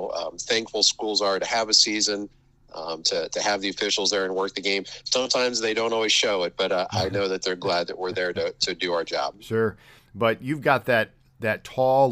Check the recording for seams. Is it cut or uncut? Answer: cut